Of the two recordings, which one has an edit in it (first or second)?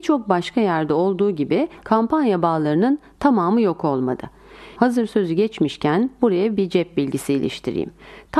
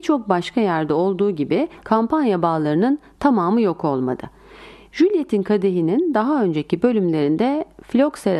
first